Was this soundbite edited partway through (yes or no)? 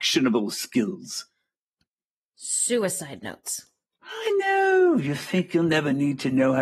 no